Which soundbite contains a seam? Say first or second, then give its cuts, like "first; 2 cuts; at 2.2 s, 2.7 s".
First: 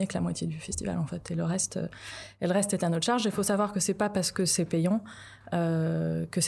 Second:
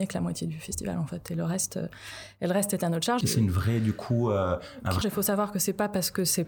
second; 2 cuts; at 3.2 s, 5.0 s